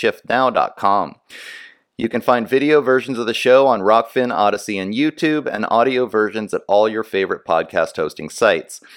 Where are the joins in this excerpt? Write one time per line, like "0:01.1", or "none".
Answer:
none

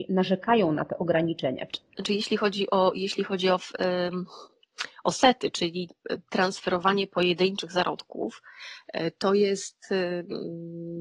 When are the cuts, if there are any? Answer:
0:01.7

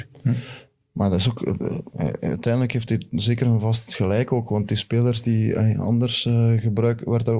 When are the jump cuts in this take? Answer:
none

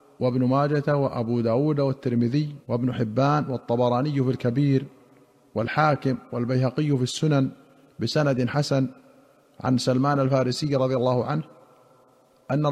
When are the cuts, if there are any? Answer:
0:02.6

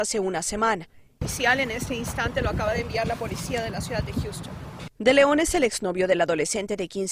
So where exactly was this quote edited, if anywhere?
0:01.2
0:04.9

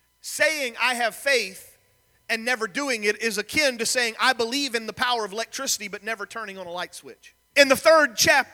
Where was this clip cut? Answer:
0:07.5

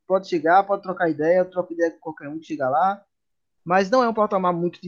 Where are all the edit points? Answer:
0:03.6

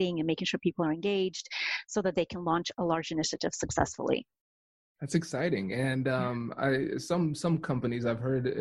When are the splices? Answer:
none

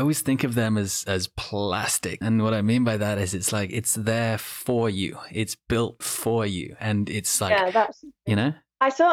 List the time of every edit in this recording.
0:02.2

